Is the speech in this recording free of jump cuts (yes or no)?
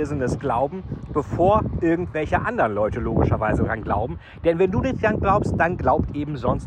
yes